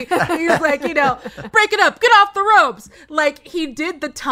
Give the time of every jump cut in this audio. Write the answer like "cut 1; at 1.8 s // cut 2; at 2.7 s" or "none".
cut 1; at 1.5 s